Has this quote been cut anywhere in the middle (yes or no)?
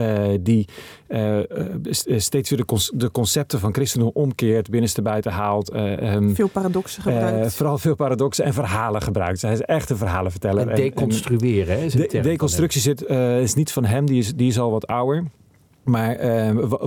no